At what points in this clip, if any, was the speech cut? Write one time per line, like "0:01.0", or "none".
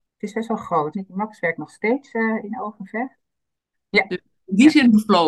0:00.9
0:03.7